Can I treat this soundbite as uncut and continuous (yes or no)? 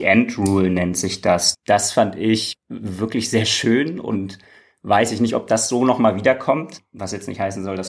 no